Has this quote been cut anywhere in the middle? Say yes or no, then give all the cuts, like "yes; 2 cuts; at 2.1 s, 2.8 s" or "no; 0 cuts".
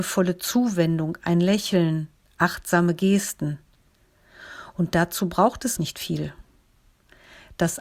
yes; 1 cut; at 5.8 s